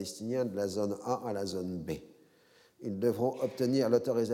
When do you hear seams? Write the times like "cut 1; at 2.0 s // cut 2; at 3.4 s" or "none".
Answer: none